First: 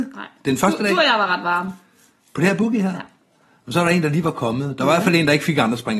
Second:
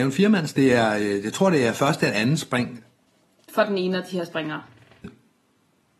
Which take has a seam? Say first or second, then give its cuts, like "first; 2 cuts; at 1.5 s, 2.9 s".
second; 1 cut; at 5.0 s